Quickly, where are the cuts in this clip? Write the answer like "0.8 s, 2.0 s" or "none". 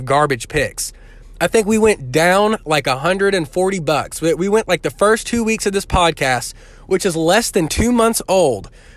1.3 s